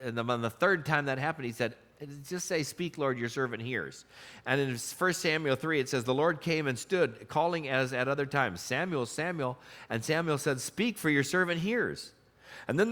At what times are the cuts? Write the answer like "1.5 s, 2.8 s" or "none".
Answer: none

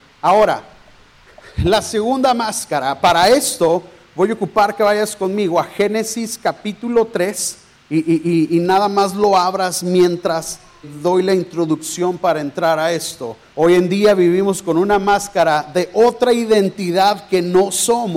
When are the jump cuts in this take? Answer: 10.8 s, 13.5 s

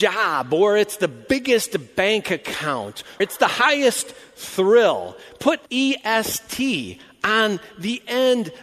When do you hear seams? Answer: 3.2 s, 5.7 s

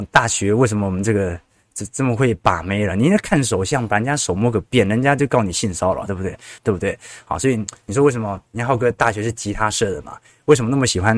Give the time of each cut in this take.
6.6 s, 8.5 s

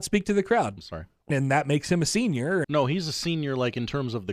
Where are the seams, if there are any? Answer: 1.3 s, 2.6 s

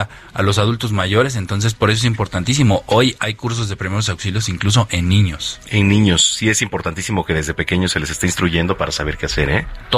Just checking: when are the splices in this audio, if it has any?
none

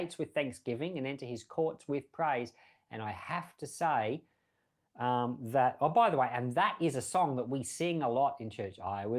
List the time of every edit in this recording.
none

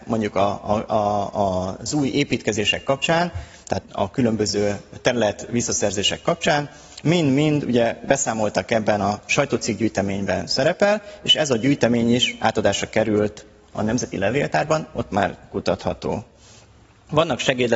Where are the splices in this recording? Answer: none

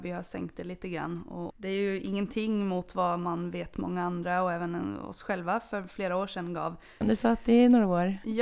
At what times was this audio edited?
1.5 s, 7.0 s

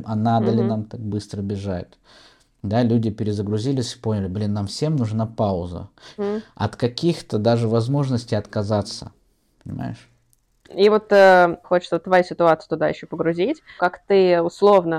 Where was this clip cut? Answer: 6.2 s, 11.6 s, 13.8 s

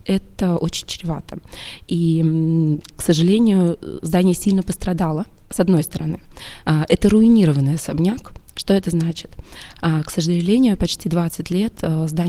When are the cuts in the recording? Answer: 6.6 s

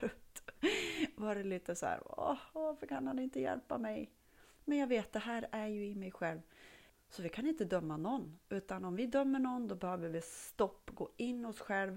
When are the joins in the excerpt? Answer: 6.9 s

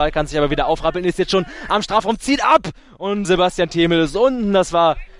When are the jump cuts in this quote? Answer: 3.2 s

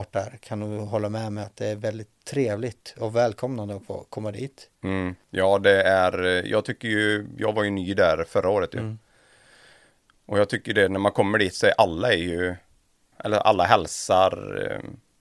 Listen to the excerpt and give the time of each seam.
5.2 s

